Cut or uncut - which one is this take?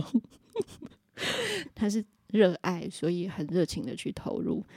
cut